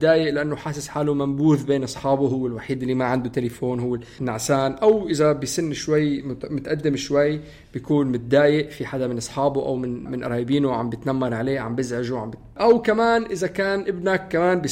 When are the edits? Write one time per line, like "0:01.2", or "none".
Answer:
0:04.2
0:10.1